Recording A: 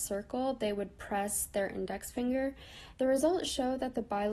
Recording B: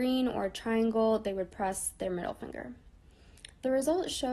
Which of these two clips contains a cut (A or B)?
A